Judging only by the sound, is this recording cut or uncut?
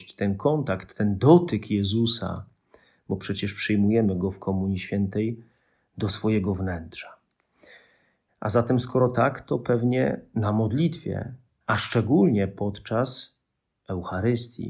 cut